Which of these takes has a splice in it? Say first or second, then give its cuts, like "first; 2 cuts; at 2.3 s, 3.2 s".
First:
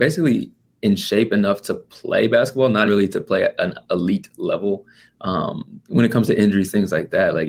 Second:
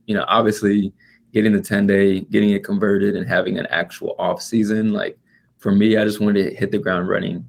first; 1 cut; at 2.9 s